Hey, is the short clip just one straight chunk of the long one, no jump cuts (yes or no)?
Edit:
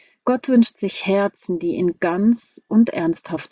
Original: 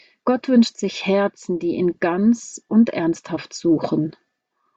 yes